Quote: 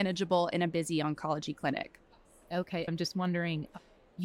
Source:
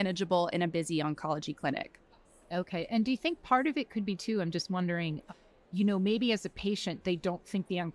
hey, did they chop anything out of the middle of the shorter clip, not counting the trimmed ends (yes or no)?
yes